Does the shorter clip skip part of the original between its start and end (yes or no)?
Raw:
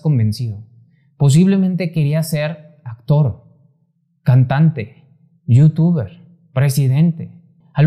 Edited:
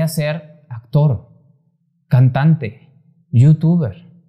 no